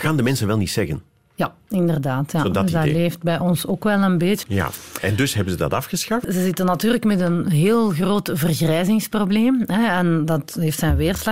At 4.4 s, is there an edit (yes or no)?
yes